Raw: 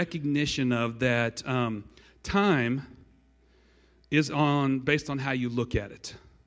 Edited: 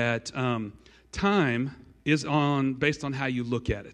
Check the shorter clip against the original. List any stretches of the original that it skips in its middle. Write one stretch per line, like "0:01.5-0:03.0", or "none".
0:03.1-0:04.1